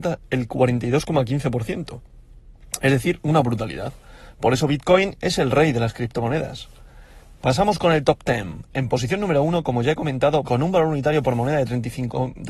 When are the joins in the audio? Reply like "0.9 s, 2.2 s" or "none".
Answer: 10.4 s